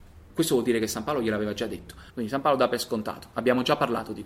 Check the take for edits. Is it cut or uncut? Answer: cut